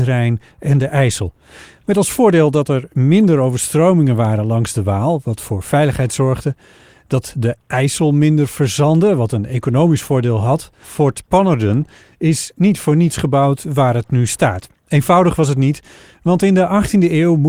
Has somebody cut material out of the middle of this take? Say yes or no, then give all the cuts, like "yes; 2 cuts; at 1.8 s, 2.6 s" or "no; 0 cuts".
yes; 2 cuts; at 10.8 s, 14.8 s